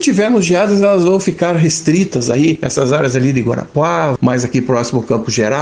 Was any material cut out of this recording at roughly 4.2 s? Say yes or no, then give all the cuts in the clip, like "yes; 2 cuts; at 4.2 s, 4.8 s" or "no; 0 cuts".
yes; 1 cut; at 4.2 s